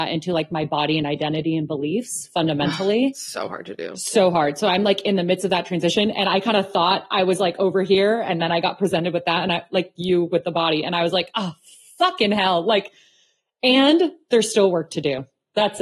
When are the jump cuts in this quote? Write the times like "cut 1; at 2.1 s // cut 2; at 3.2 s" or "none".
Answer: none